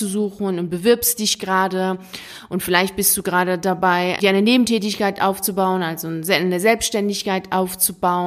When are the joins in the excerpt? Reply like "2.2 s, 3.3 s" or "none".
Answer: 4.2 s